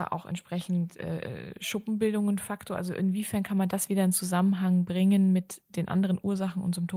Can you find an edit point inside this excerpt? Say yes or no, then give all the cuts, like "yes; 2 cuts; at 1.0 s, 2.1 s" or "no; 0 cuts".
no; 0 cuts